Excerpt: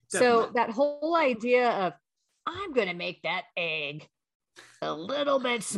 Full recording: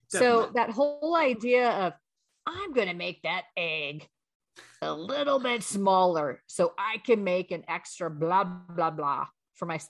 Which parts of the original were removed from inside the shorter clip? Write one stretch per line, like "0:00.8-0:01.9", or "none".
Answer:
none